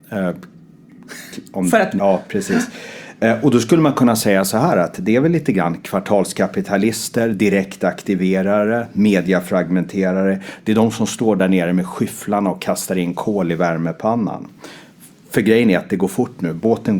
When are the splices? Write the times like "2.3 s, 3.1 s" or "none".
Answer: 2.0 s